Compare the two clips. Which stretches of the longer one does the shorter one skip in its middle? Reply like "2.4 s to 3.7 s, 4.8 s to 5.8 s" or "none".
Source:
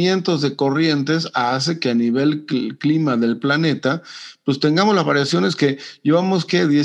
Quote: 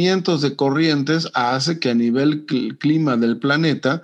none